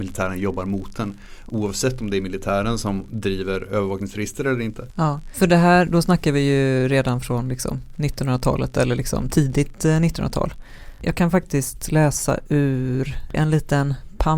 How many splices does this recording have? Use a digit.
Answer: 0